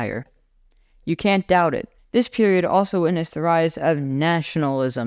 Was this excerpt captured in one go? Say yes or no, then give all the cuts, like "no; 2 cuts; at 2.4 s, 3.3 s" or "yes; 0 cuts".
no; 1 cut; at 2.0 s